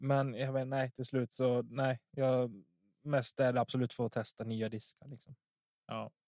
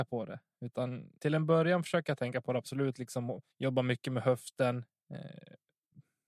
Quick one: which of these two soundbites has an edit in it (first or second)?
second